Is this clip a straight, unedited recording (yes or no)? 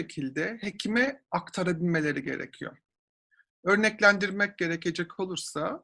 yes